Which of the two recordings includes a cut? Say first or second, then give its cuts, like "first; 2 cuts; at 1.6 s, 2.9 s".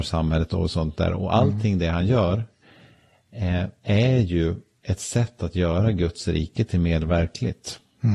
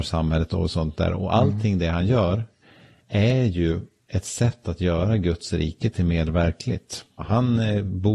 second; 2 cuts; at 3.0 s, 7.2 s